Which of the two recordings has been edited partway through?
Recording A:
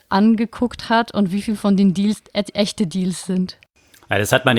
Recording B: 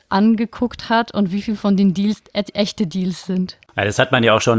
B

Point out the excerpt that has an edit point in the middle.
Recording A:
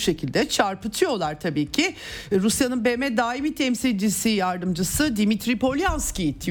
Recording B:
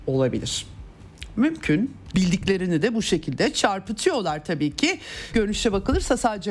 B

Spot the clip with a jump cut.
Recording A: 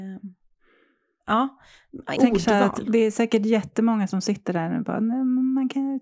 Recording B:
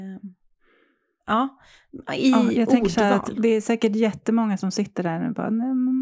A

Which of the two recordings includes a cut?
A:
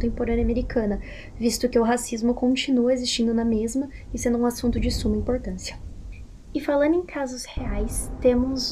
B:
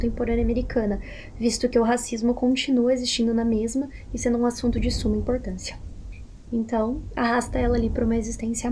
B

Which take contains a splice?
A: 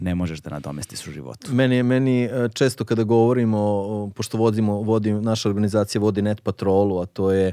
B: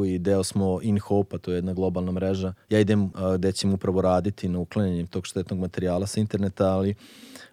B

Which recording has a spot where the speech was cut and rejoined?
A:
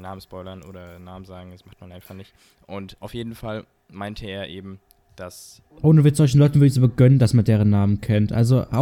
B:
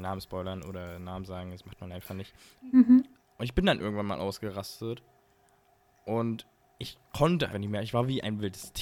B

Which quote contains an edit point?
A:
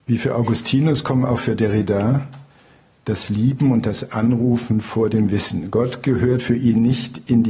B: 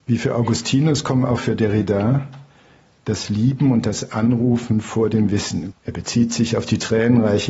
B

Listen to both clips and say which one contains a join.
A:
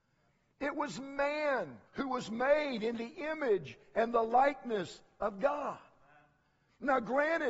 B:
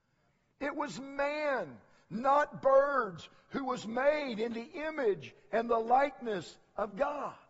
A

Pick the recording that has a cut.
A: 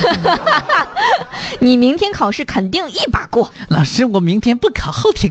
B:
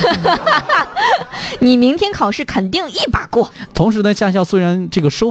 B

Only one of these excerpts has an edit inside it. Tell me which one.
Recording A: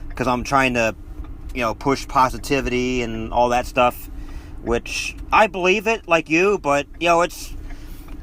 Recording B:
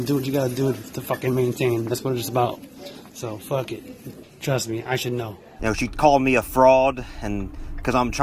B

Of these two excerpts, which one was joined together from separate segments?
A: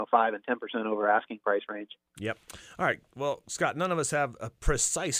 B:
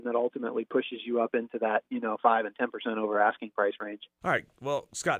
B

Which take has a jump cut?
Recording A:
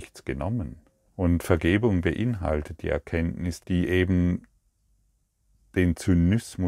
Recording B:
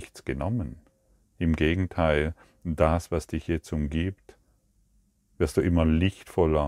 A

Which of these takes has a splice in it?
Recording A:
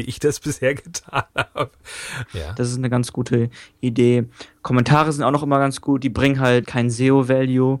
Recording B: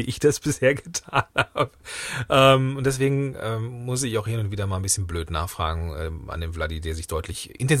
A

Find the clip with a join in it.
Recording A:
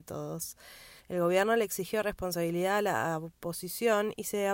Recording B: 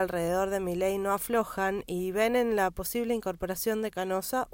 A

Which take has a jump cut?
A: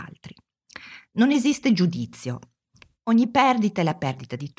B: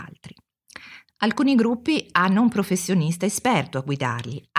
B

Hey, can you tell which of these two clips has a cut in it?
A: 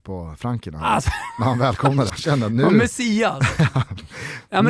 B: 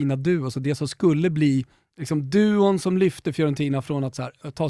A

